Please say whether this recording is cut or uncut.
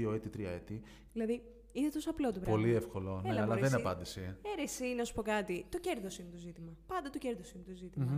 cut